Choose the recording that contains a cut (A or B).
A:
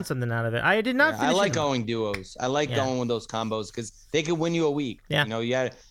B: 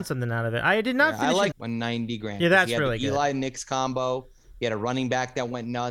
B